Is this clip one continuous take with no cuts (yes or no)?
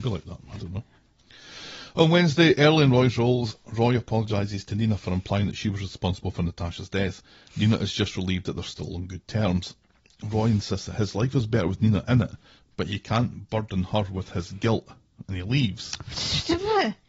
yes